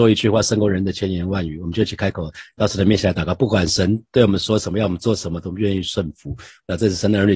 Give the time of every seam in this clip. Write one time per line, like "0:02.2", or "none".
none